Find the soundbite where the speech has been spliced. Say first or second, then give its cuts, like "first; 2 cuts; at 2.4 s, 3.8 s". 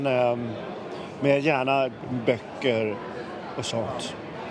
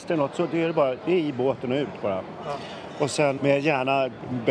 second; 1 cut; at 3.4 s